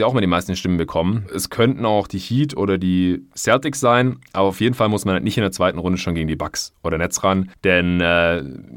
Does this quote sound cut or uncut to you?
cut